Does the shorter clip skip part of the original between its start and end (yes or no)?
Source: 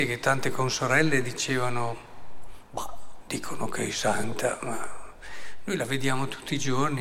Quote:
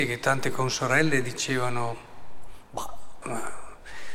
yes